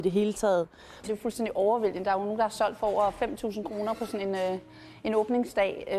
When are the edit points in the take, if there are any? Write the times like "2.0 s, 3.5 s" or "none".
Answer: 1.0 s